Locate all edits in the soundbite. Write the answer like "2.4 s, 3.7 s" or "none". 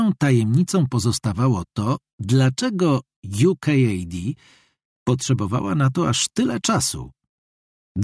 none